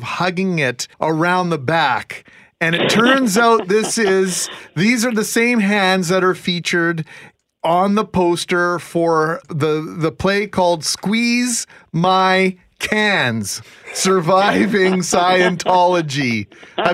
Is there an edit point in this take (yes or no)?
yes